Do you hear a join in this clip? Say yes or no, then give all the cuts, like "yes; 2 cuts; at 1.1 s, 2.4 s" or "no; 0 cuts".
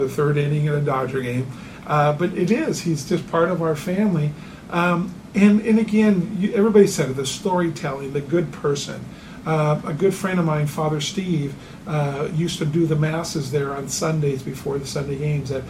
no; 0 cuts